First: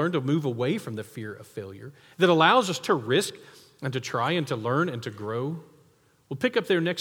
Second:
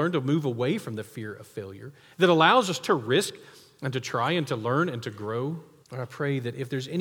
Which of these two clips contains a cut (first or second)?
second